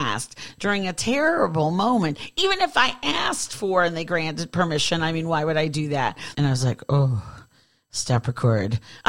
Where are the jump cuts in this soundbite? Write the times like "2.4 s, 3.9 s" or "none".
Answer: 6.3 s